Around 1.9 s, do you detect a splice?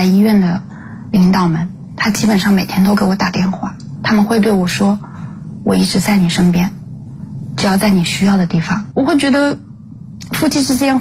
no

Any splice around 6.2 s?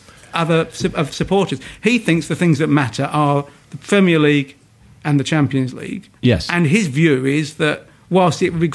yes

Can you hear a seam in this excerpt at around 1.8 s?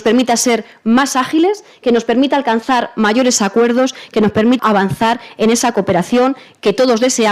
no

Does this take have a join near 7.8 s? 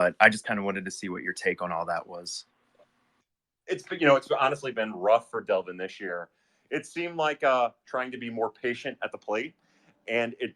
yes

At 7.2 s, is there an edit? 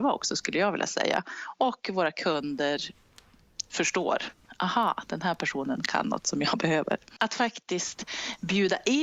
yes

